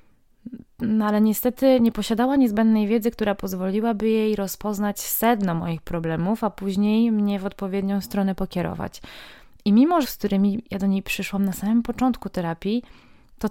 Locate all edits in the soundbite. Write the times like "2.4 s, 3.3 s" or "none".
10.0 s